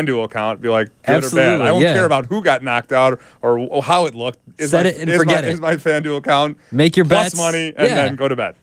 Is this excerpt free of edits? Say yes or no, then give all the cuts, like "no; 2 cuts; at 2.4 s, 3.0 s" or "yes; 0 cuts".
yes; 0 cuts